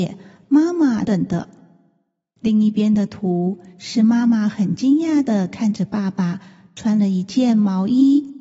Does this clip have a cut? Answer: yes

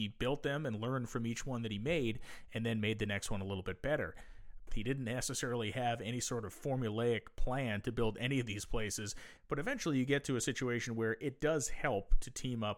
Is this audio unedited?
no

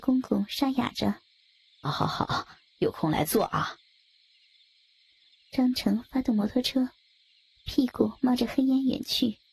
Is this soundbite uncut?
no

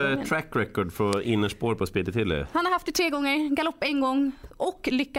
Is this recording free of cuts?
yes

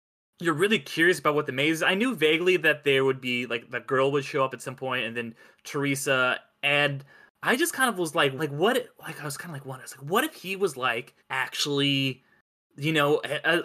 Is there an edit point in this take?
yes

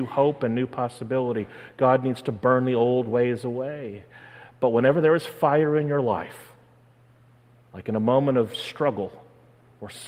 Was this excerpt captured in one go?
yes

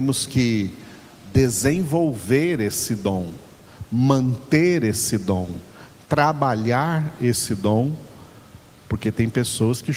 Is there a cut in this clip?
no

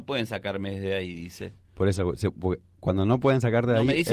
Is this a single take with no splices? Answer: yes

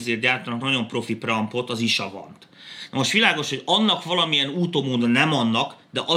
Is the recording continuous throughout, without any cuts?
yes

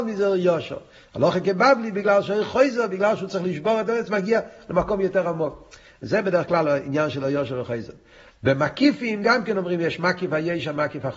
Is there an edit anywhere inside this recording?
no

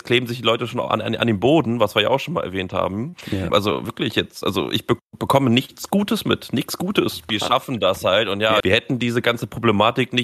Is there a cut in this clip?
yes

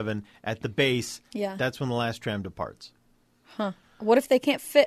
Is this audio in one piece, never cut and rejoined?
yes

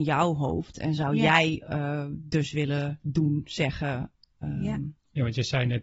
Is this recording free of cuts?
yes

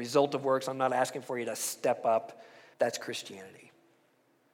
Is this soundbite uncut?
no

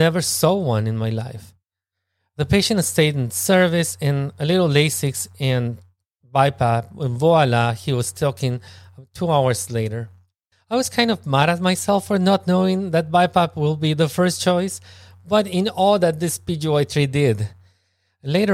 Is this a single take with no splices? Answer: no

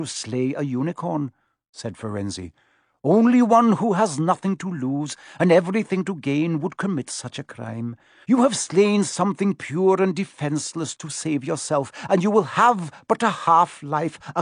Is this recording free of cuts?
no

